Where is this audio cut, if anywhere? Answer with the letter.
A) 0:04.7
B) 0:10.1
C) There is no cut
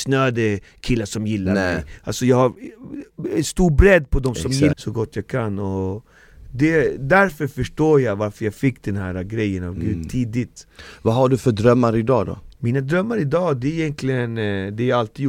A